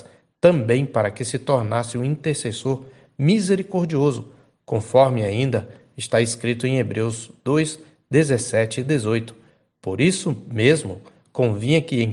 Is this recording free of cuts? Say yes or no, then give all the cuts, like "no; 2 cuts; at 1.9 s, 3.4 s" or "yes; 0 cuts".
yes; 0 cuts